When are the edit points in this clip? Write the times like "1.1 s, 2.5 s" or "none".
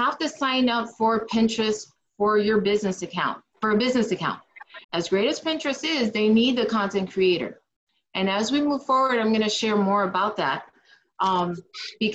4.8 s